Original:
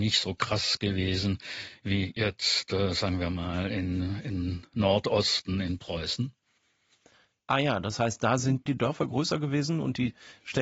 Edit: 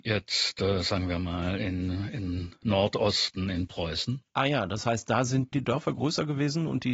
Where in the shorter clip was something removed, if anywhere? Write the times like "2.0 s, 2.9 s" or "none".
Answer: 4.3 s